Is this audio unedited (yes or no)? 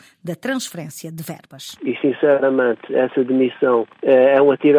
no